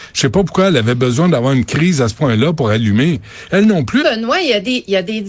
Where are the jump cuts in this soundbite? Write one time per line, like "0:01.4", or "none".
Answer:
0:04.0

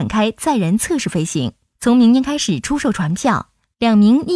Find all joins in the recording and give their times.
none

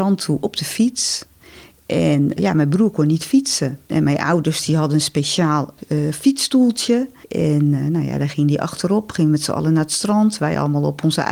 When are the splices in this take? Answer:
0:02.4

